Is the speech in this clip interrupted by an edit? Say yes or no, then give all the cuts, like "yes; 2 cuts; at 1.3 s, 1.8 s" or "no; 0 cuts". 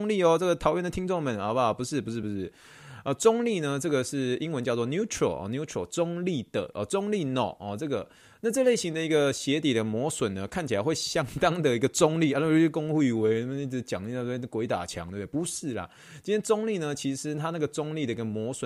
no; 0 cuts